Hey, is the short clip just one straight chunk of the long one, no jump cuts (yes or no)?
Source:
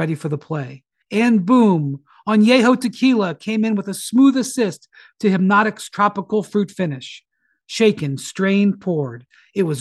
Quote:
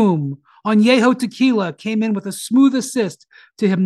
yes